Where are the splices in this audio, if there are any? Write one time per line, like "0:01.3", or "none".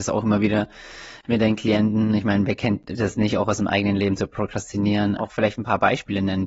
0:05.2